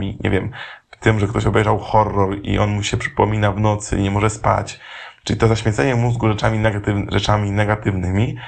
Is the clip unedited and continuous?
yes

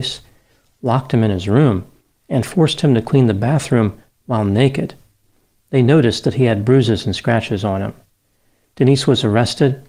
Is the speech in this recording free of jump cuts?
yes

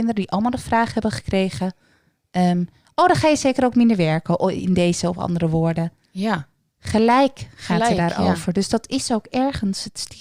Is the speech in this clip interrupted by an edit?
no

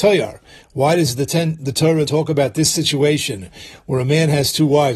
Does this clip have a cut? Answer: yes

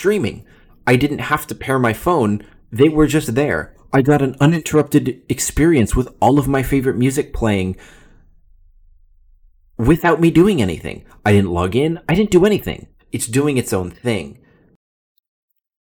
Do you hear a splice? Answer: yes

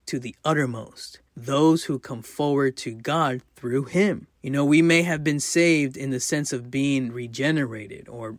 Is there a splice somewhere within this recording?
yes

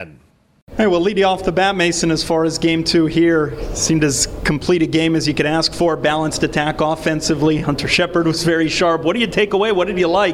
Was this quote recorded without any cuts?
yes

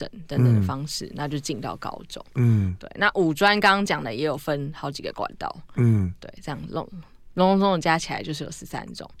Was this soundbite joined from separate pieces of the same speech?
no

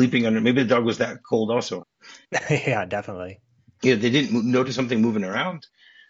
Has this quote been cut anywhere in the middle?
yes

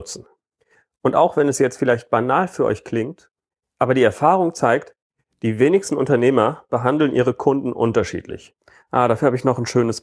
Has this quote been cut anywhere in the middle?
no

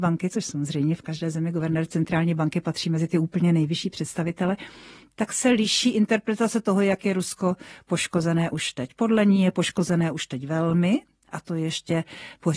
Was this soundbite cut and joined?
no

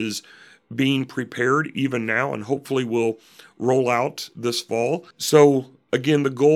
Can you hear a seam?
yes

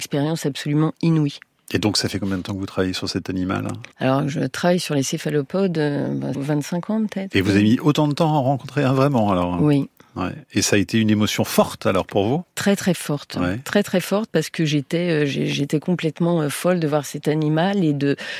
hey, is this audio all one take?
no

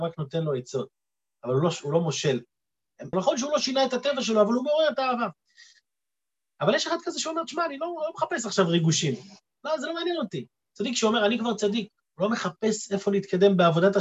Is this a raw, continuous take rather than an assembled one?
no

